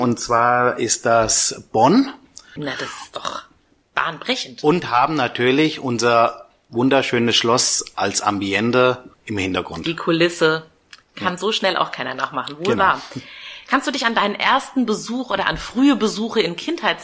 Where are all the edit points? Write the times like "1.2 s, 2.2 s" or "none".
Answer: 2.6 s, 9.1 s